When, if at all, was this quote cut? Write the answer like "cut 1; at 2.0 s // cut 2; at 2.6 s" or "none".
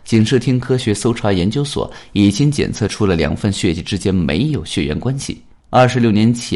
cut 1; at 5.6 s